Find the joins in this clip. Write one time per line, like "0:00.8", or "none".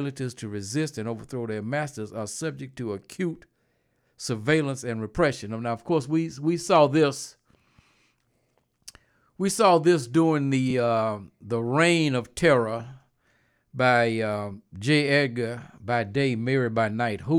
none